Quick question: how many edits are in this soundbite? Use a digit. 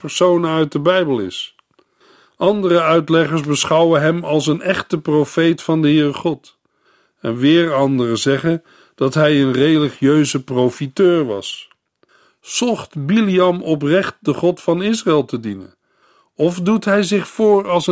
0